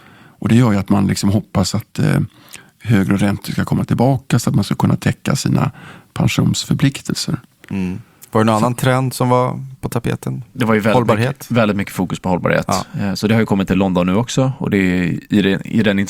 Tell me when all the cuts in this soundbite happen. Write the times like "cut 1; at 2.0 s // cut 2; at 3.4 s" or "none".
none